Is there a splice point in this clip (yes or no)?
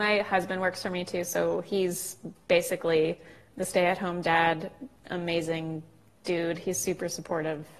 no